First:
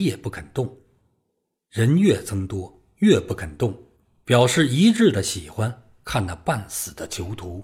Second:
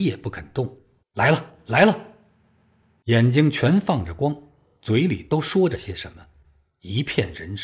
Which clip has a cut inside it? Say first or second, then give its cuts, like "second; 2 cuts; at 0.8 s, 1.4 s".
second; 1 cut; at 1.0 s